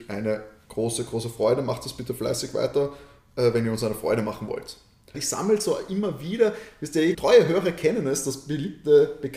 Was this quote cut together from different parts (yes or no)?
yes